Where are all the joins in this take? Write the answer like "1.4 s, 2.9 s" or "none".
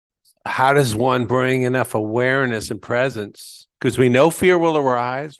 3.7 s